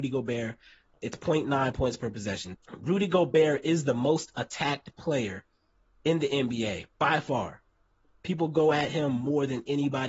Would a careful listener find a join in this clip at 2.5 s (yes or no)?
yes